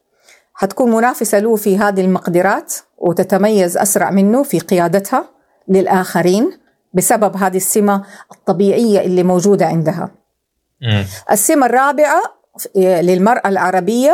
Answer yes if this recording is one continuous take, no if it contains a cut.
yes